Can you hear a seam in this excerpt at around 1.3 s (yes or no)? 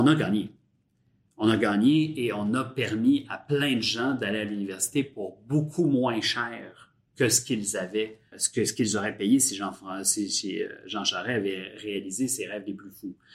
no